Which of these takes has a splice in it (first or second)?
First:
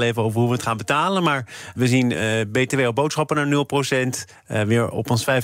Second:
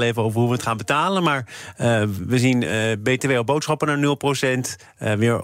first